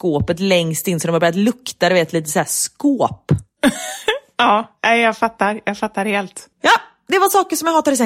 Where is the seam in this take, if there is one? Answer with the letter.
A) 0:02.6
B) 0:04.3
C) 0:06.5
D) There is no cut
C